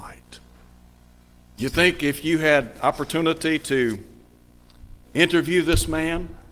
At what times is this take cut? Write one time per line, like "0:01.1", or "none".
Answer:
0:01.6
0:05.0